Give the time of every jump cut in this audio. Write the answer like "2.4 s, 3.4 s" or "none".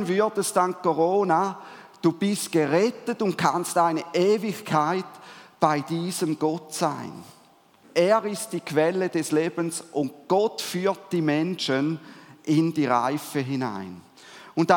7.8 s